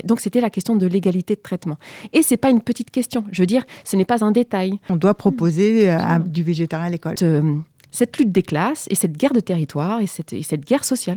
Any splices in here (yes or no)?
yes